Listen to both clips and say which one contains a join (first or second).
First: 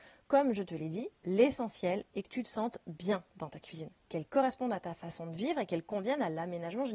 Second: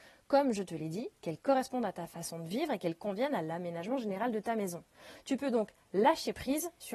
second